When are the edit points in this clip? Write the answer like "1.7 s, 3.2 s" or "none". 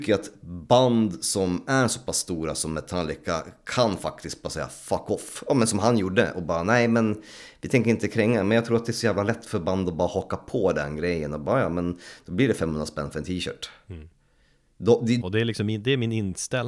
15.2 s